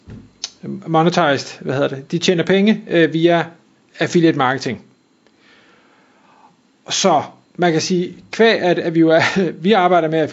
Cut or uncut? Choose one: uncut